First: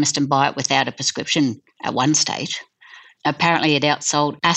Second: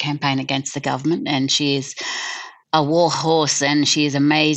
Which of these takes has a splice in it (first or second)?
first